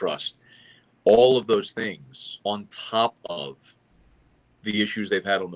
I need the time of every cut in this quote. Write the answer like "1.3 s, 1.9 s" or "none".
2.4 s